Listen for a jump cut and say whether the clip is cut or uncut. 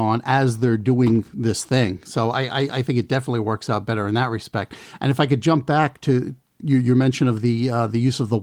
uncut